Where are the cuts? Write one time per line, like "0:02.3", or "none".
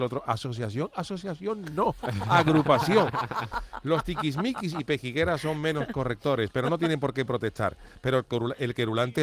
none

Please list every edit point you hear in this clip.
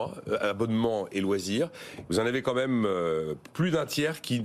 0:02.1

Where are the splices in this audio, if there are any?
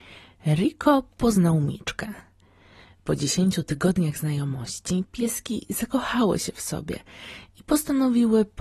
none

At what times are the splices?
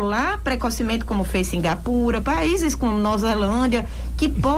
0:02.2

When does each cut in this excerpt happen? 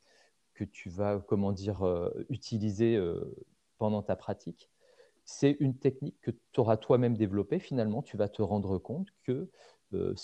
none

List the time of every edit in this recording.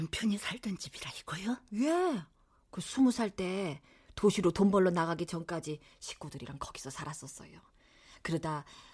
none

